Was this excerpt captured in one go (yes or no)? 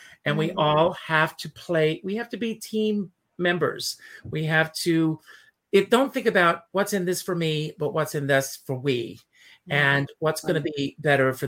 yes